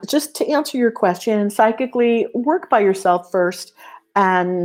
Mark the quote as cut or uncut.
uncut